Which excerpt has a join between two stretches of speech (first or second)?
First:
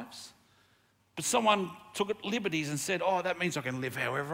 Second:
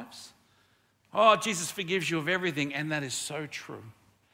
first